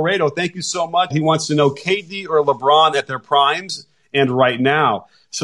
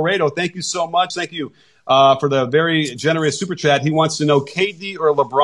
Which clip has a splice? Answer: first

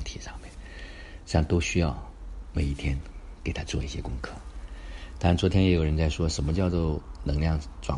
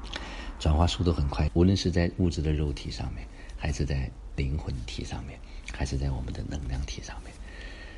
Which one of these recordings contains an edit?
second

